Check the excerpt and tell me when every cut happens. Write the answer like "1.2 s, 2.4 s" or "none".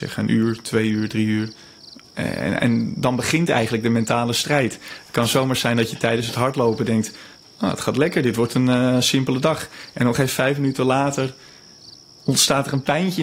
none